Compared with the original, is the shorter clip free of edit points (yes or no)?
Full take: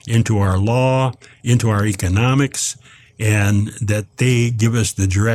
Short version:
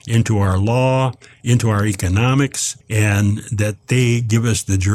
no